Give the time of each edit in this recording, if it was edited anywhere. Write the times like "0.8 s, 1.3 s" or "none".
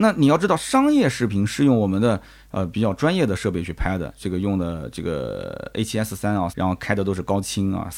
6.5 s